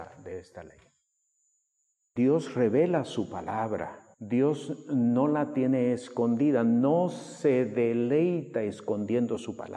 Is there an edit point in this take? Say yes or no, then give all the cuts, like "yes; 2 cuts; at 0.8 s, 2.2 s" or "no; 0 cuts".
yes; 1 cut; at 4.1 s